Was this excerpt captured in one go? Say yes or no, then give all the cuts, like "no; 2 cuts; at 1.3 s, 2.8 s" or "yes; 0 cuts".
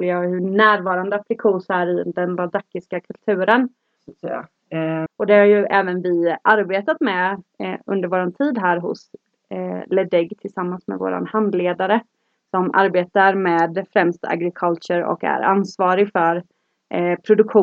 no; 2 cuts; at 4.0 s, 5.1 s